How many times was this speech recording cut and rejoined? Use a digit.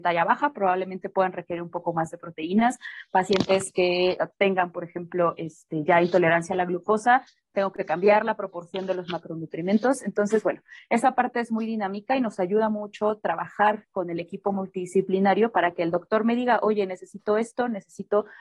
0